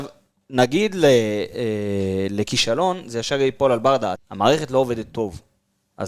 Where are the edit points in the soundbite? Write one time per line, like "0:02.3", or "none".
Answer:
0:04.1